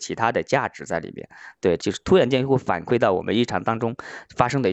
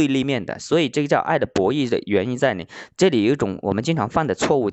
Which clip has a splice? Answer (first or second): first